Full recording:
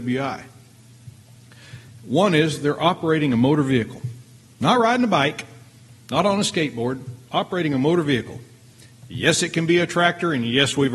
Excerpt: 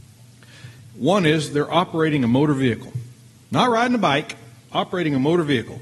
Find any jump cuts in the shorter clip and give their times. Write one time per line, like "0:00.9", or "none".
0:04.6